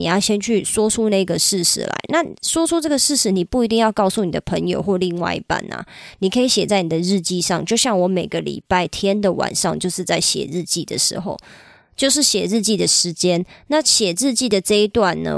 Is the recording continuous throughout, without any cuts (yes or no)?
yes